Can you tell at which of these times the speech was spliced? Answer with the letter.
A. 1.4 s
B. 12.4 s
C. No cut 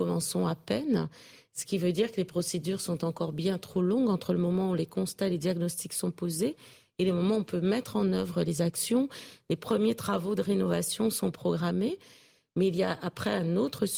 C